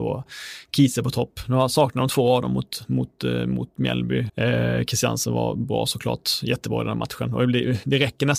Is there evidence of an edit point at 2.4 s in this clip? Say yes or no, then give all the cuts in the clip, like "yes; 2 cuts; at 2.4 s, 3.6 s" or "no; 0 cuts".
no; 1 cut; at 4.3 s